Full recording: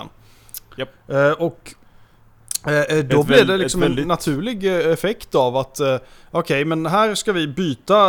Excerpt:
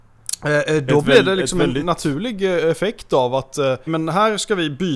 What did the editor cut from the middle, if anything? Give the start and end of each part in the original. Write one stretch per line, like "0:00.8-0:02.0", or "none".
0:06.1-0:06.6